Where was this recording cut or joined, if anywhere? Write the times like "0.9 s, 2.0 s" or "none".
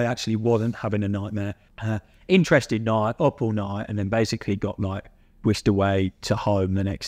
1.7 s